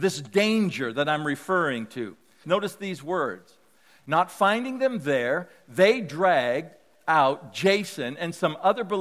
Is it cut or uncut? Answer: cut